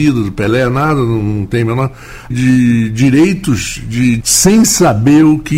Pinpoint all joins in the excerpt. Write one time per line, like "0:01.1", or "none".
0:02.3
0:04.2